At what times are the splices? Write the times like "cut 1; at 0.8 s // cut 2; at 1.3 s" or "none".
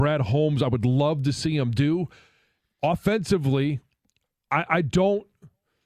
none